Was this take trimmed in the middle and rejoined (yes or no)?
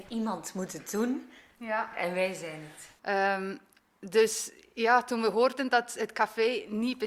yes